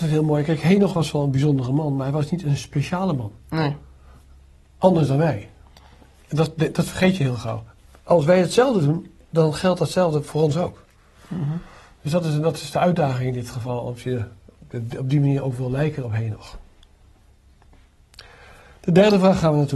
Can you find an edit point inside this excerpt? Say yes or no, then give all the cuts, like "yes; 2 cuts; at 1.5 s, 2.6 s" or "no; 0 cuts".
no; 0 cuts